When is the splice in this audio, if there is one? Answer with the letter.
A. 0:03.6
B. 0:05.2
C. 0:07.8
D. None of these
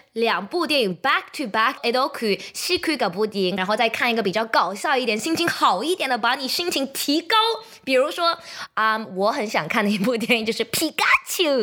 A